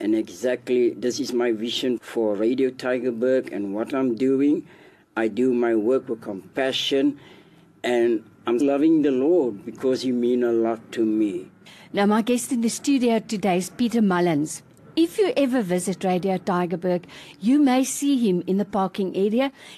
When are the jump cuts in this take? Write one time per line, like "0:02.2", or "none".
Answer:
0:02.0
0:08.6

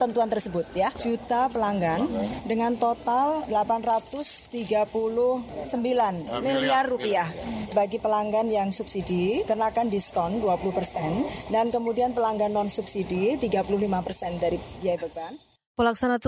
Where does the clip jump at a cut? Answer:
0:00.9

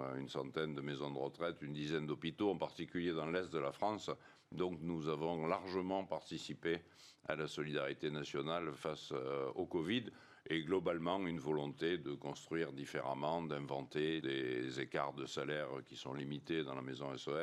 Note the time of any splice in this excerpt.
0:14.2

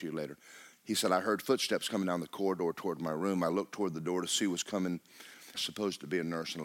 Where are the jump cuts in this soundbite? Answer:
0:05.5

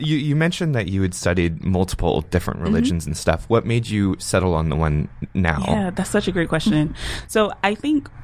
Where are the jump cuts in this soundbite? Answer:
none

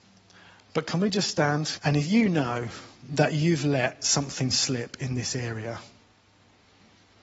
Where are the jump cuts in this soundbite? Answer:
0:01.8

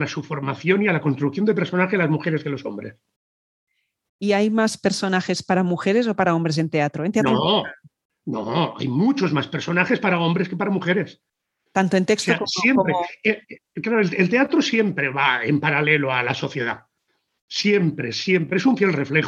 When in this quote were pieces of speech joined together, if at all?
none

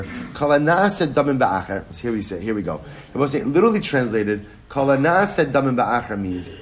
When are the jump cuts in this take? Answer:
0:01.9

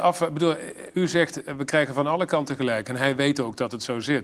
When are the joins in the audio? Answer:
0:00.9

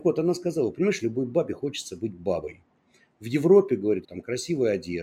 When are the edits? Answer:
0:04.0

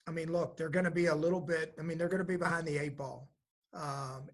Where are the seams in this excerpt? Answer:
none

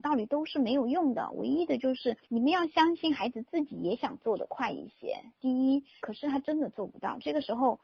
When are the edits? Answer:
0:02.2
0:06.0

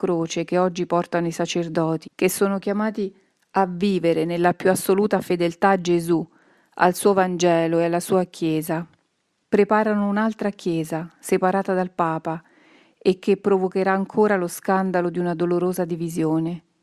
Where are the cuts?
0:02.0
0:09.4

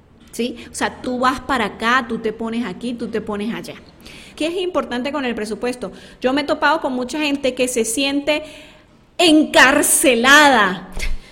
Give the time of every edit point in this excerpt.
0:01.0
0:04.4

